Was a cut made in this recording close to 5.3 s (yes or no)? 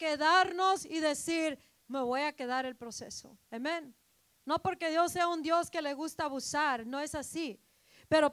no